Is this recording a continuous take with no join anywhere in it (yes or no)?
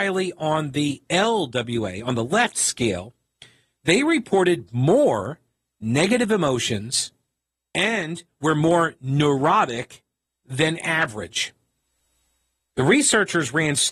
no